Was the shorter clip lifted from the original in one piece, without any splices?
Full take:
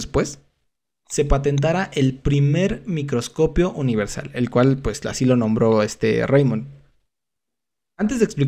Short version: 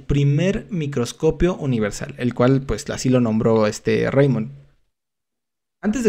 yes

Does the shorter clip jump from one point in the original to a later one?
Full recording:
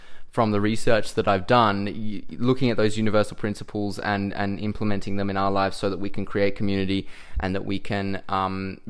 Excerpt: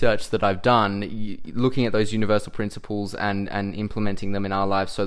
no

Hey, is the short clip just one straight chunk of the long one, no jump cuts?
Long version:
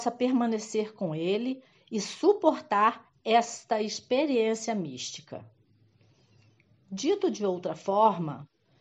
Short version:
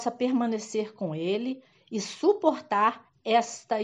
yes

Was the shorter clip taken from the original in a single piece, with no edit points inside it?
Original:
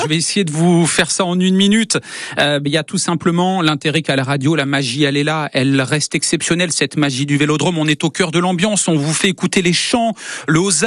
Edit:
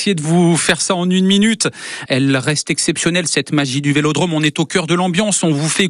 no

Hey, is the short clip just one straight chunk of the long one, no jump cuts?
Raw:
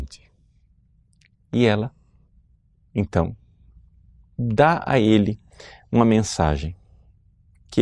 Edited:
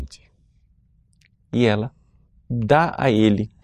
no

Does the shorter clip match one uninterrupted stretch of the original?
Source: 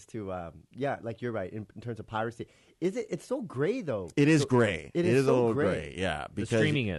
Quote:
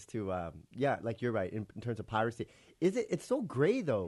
yes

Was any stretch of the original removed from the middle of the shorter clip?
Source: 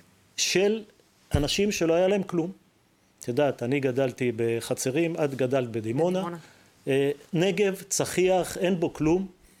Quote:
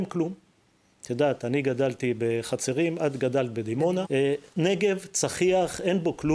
yes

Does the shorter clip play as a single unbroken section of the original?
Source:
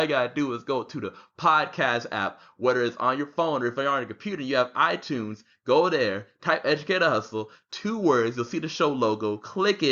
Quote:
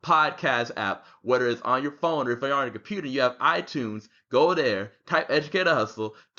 yes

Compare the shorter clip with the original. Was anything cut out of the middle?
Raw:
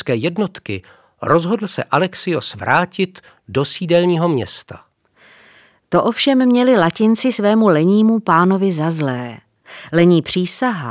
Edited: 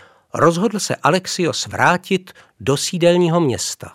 no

